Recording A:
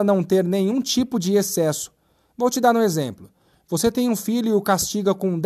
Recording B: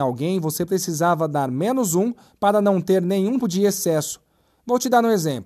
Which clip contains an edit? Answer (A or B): B